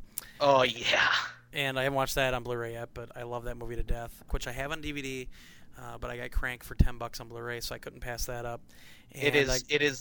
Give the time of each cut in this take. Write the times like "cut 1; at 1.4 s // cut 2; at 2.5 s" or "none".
cut 1; at 4.3 s

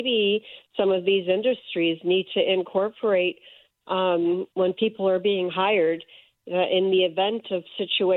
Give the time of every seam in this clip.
none

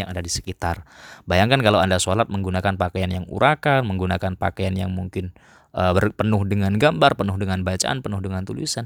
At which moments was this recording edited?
none

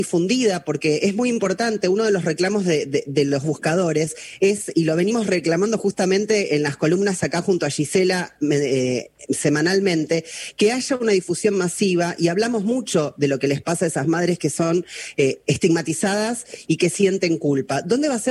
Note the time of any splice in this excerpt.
none

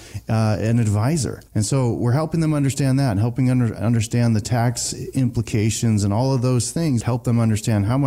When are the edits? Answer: cut 1; at 1.5 s // cut 2; at 7.0 s

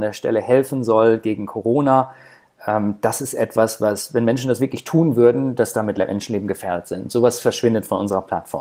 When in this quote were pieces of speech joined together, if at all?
none

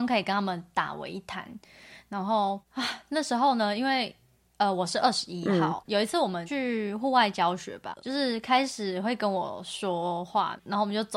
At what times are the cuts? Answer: cut 1; at 8.0 s

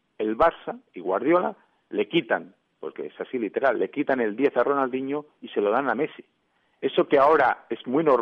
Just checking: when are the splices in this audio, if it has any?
none

